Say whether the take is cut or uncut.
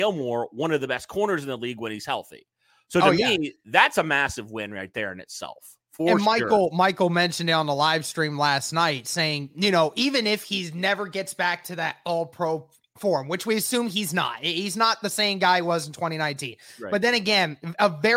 uncut